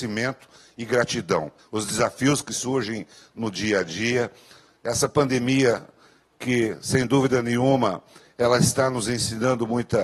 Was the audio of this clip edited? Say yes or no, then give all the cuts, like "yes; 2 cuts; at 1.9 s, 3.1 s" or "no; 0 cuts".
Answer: yes; 1 cut; at 1.6 s